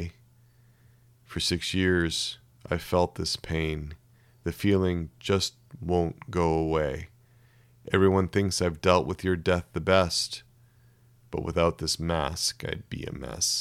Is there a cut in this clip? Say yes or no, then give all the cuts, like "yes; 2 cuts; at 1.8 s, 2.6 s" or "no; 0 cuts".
no; 0 cuts